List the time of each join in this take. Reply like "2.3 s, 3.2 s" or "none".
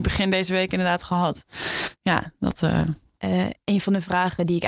3.2 s